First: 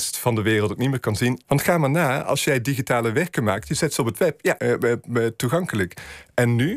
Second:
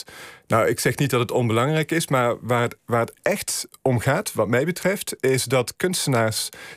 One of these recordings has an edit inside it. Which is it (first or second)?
first